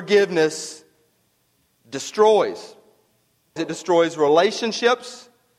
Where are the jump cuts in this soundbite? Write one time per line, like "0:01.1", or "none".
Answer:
0:03.6